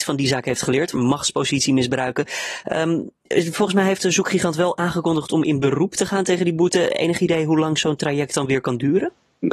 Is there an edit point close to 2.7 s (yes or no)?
no